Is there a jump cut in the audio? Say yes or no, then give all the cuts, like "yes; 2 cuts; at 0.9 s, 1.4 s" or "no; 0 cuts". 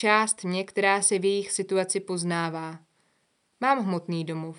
no; 0 cuts